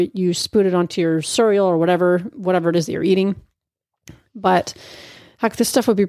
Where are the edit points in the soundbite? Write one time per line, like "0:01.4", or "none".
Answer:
none